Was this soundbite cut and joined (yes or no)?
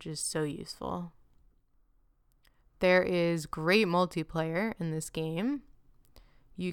no